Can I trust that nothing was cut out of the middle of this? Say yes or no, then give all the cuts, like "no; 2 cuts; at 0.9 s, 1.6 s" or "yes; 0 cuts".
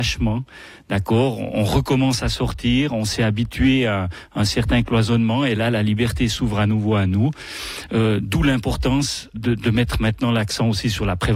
no; 1 cut; at 9.3 s